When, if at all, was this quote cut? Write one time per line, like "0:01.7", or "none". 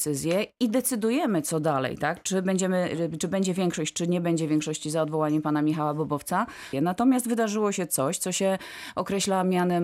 0:06.7